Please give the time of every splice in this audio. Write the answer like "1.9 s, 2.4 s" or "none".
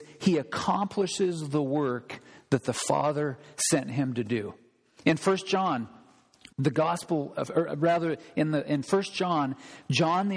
6.5 s